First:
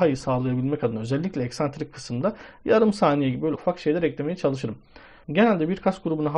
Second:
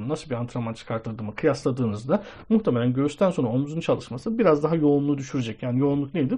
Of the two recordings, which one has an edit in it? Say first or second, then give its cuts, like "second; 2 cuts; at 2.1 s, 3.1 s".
first; 2 cuts; at 3.5 s, 5.2 s